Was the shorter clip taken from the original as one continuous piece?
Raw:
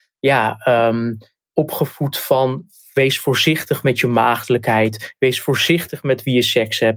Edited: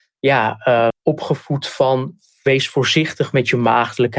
no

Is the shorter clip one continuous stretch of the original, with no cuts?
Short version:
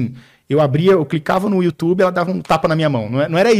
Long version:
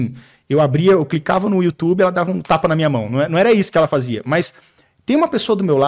yes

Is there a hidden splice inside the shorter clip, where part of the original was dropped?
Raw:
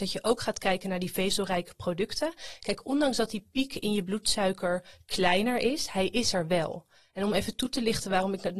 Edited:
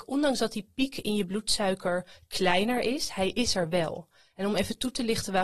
no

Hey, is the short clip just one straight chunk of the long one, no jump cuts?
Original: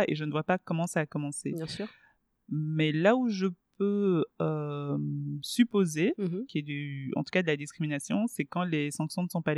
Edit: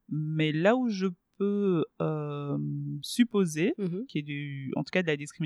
yes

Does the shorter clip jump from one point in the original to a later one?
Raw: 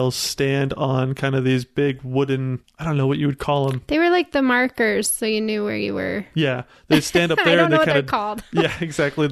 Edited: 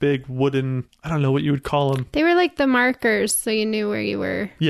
no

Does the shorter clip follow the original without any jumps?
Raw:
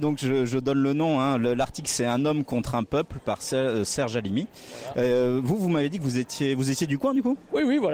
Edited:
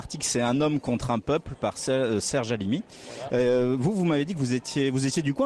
yes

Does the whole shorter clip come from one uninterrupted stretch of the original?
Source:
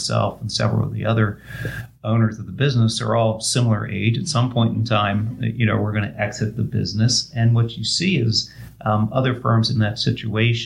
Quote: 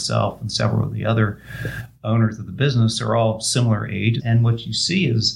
no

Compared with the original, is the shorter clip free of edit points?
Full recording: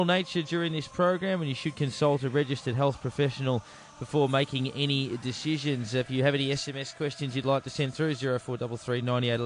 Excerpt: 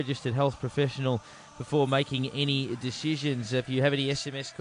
yes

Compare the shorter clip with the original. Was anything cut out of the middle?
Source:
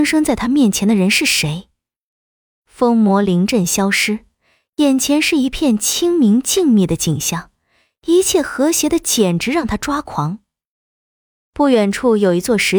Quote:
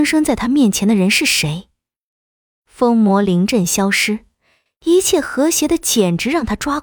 yes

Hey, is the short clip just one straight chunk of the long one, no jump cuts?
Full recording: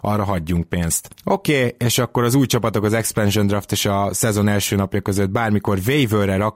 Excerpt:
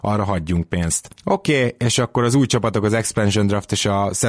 yes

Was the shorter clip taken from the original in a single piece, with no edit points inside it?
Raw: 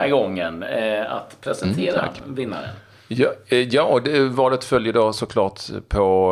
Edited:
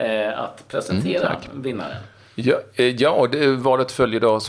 yes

